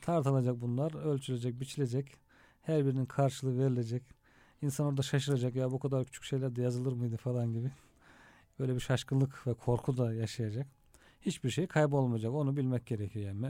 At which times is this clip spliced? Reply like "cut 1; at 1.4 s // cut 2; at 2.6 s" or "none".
none